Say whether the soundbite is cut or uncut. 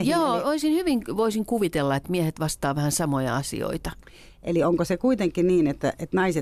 uncut